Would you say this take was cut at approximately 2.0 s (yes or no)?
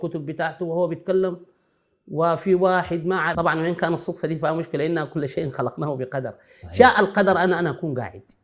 no